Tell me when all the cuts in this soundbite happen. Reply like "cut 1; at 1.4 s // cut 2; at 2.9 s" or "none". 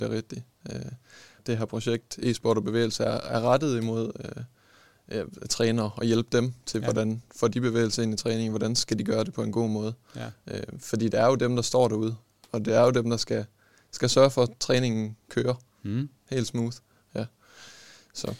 cut 1; at 1.4 s